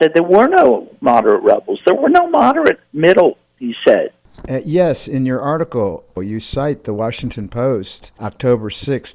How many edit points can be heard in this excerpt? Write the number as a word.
zero